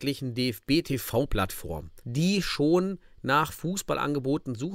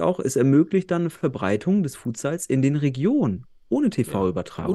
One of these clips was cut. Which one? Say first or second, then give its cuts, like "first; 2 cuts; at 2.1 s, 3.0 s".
first; 1 cut; at 2.0 s